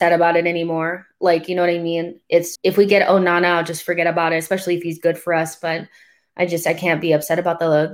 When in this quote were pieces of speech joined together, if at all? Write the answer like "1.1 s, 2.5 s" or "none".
2.5 s